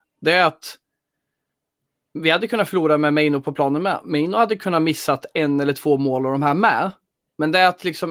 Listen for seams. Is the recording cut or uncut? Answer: uncut